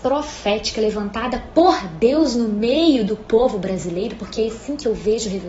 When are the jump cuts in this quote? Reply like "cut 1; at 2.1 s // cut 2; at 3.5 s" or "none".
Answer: none